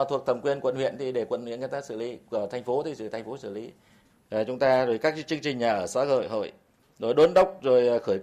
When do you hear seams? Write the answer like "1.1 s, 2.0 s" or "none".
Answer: none